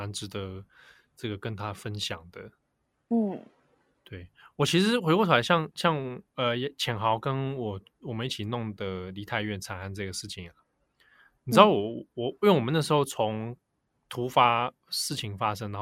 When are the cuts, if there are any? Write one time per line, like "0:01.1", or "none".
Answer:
0:05.7